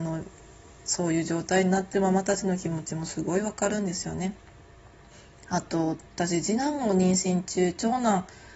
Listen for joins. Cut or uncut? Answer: uncut